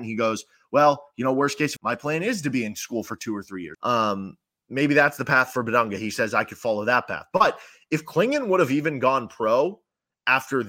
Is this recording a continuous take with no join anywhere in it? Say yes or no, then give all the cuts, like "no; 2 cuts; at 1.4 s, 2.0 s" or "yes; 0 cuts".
no; 2 cuts; at 1.8 s, 3.7 s